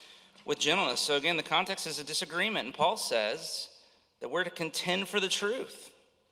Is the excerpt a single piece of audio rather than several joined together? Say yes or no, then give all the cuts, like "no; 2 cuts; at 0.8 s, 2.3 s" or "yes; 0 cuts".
yes; 0 cuts